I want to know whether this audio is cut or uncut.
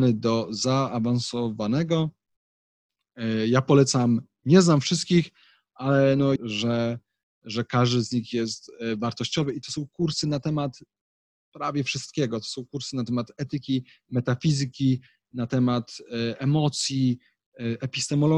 cut